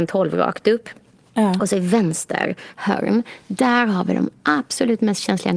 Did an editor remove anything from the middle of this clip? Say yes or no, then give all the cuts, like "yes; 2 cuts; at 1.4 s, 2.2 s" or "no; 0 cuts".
no; 0 cuts